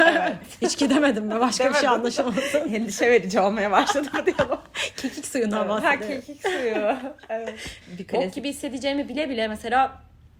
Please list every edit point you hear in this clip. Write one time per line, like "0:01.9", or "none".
0:07.8